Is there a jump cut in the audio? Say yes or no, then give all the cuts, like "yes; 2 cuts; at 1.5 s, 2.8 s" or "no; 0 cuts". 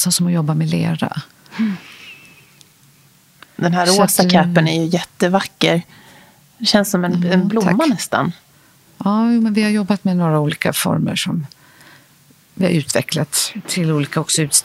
no; 0 cuts